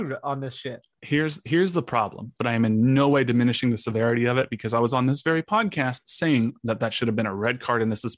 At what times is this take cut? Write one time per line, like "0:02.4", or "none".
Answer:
0:02.4